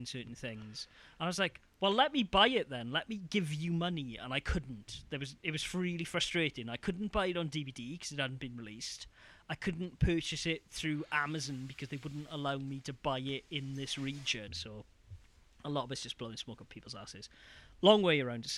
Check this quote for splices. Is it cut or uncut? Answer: cut